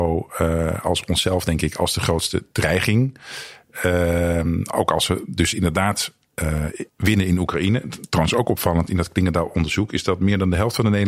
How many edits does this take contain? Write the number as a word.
one